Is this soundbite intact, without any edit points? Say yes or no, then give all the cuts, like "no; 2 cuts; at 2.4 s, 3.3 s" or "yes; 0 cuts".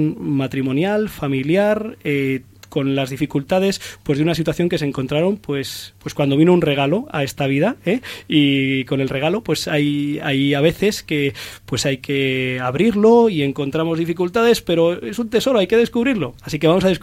yes; 0 cuts